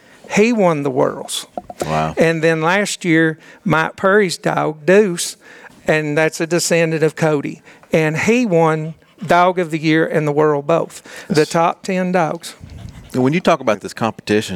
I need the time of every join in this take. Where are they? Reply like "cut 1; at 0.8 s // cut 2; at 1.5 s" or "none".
cut 1; at 5.7 s // cut 2; at 11.3 s